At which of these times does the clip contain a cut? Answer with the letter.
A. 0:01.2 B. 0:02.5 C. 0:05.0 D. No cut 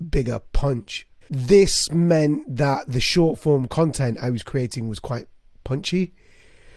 A